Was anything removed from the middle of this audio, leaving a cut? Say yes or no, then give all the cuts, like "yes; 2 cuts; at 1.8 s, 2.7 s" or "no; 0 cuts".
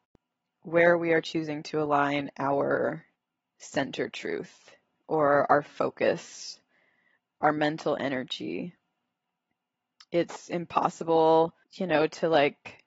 yes; 1 cut; at 11.6 s